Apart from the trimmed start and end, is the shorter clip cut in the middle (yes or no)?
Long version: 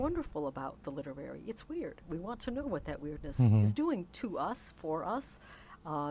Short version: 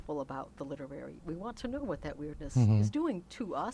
yes